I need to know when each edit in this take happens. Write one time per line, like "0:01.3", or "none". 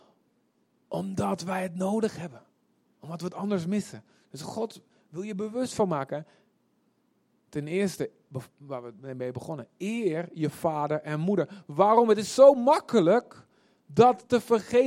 none